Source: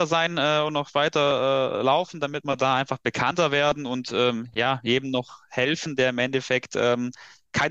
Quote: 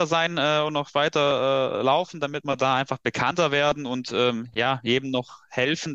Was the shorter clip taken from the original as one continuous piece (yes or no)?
yes